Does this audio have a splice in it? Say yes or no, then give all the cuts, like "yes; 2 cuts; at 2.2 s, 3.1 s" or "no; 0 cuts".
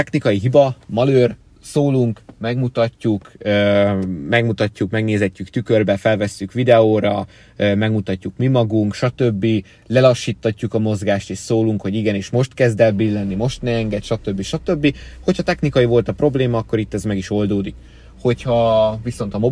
no; 0 cuts